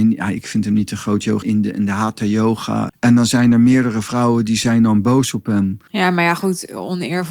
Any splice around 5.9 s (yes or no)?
yes